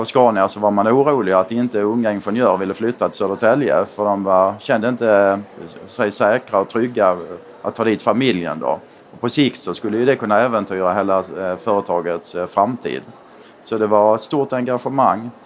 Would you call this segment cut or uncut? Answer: uncut